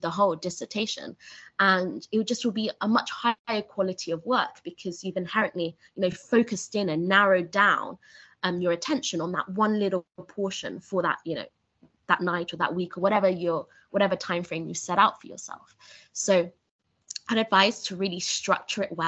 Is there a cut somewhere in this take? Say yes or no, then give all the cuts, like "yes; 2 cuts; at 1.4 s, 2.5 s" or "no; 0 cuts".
no; 0 cuts